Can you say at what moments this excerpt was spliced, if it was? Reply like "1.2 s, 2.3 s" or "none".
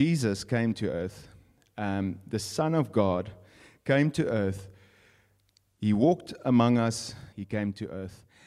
7.3 s